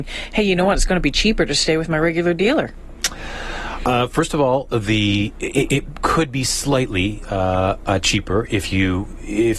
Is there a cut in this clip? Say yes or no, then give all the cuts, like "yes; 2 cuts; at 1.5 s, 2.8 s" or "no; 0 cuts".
no; 0 cuts